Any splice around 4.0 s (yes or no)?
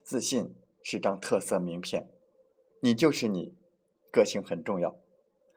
no